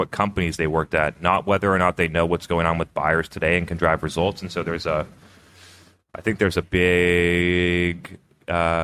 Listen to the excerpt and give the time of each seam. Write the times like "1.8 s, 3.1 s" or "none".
6.6 s